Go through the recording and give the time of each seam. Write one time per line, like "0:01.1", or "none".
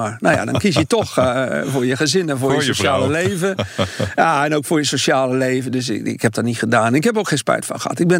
none